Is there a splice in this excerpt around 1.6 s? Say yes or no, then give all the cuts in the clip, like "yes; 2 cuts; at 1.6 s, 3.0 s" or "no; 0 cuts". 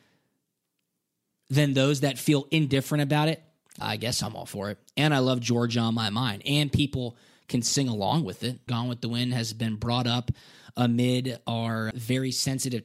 no; 3 cuts; at 3.8 s, 8.7 s, 11.9 s